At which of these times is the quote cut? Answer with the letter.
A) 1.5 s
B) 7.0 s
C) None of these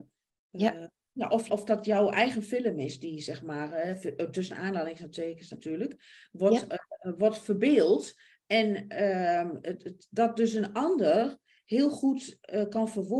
A